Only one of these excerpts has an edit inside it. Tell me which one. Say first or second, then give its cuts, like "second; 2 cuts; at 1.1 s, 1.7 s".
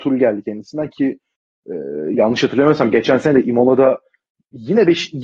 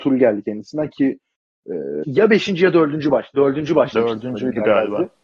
second; 1 cut; at 2.0 s